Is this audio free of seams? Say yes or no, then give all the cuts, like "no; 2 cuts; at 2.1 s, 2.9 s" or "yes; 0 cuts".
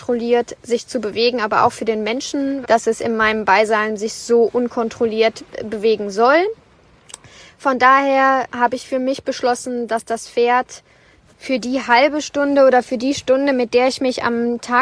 no; 1 cut; at 2.6 s